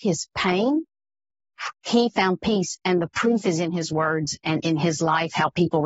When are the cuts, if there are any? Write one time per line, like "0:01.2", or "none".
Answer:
0:01.7